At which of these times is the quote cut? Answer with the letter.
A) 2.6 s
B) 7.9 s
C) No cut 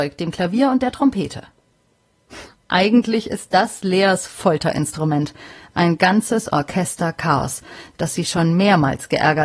C